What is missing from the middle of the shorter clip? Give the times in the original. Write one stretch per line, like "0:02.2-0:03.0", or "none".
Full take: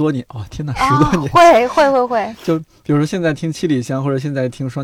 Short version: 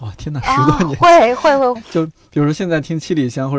0:02.1-0:02.3